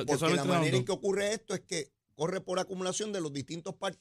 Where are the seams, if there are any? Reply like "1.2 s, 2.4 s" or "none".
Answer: 2.0 s

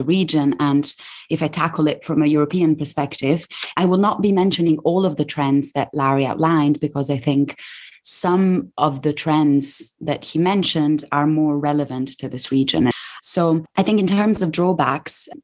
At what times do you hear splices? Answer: 13.2 s

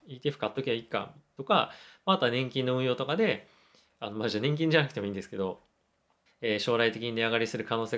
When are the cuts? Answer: 6.3 s

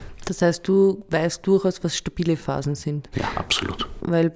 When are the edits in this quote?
3.1 s

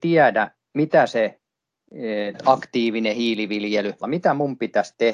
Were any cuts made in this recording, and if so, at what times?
2.3 s, 4.0 s

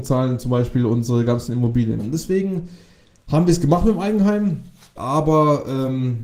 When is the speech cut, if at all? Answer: 2.0 s, 5.0 s

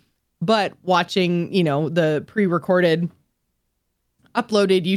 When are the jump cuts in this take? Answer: none

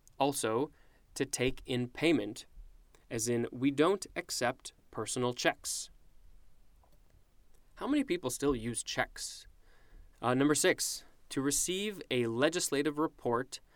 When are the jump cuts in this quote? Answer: 10.1 s

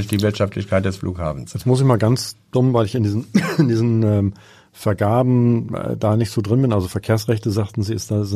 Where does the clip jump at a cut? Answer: none

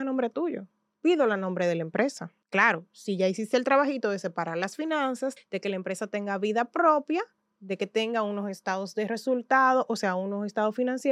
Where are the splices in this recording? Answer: 2.4 s, 5.4 s

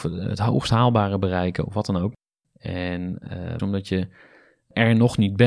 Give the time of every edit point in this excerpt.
2.4 s, 3.6 s

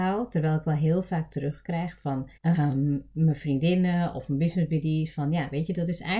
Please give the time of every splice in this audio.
2.4 s

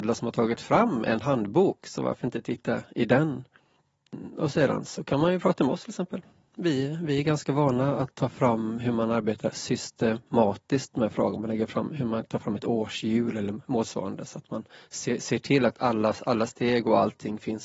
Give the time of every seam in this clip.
none

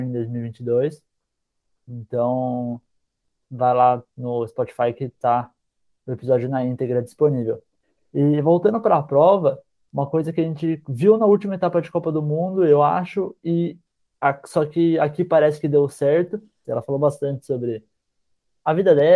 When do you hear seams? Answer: 3.4 s, 16.6 s

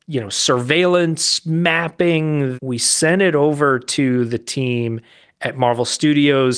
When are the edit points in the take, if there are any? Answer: 2.5 s

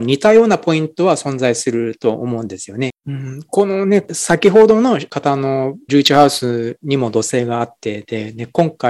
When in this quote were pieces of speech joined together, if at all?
2.9 s

